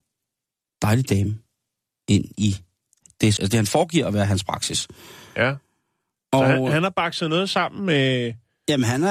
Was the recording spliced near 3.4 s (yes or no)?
yes